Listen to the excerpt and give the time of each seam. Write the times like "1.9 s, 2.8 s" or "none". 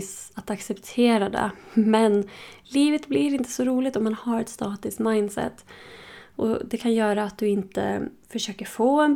none